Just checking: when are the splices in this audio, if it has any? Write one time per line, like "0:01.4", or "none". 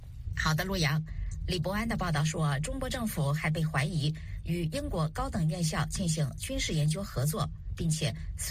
none